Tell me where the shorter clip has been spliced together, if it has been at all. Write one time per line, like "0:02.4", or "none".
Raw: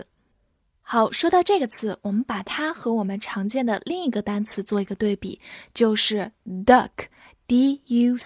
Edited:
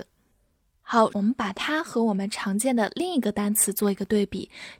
0:01.1